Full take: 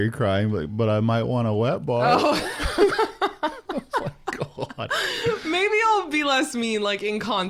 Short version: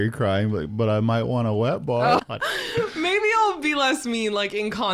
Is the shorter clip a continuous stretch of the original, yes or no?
no